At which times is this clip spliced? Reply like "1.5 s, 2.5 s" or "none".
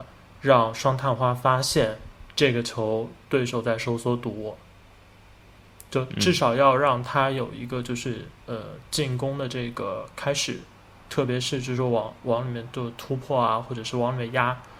none